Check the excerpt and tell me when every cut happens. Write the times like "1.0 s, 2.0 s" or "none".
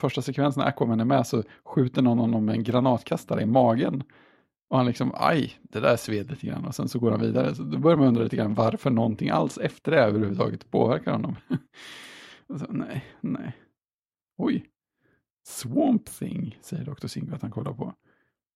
none